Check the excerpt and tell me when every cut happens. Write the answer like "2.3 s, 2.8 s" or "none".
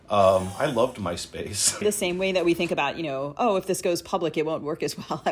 1.8 s